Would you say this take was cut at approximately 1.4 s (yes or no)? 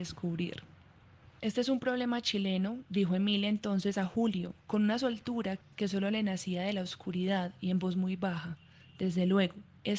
yes